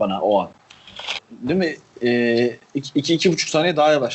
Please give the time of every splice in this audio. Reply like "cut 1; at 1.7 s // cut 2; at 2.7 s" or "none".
cut 1; at 1.2 s